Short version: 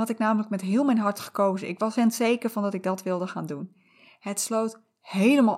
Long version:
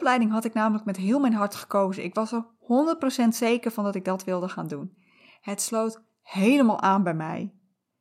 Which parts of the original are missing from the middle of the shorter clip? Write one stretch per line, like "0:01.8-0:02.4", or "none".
0:02.3-0:03.2